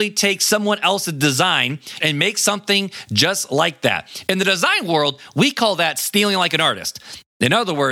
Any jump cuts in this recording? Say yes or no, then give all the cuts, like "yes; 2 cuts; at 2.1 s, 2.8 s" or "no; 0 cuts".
yes; 1 cut; at 2.0 s